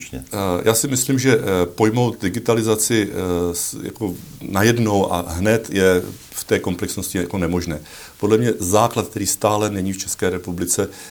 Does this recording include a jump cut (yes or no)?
no